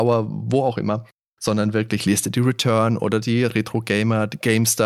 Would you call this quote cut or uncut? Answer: uncut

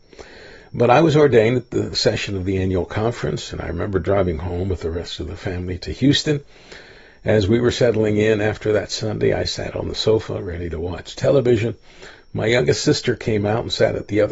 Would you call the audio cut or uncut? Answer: uncut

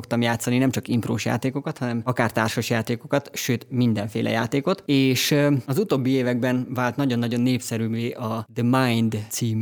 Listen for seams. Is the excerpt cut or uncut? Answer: uncut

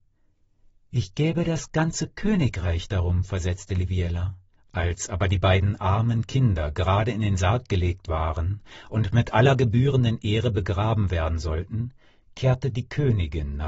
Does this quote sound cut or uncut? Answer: cut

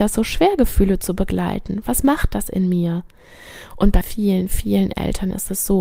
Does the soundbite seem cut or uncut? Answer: cut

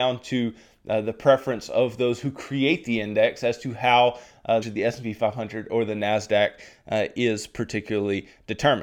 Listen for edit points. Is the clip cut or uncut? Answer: cut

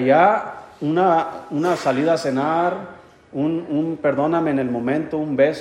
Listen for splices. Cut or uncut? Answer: uncut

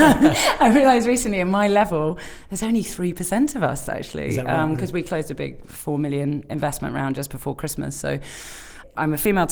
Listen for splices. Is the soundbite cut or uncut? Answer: uncut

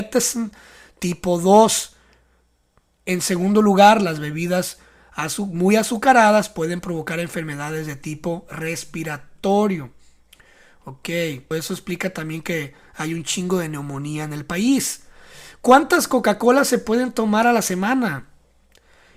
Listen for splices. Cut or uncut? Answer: cut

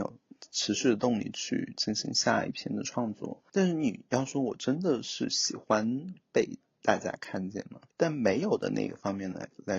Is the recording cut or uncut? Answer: cut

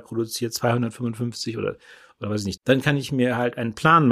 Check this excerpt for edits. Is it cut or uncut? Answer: cut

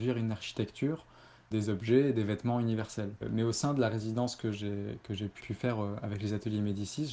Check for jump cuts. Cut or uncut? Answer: cut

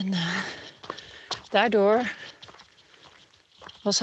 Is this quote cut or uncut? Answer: cut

